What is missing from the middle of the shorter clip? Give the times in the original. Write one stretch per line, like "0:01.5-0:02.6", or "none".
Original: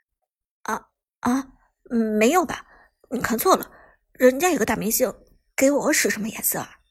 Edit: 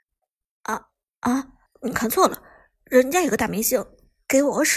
0:01.7-0:02.9